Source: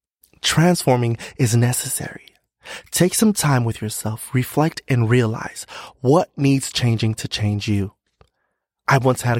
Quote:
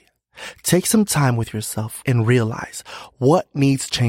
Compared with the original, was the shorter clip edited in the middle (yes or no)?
yes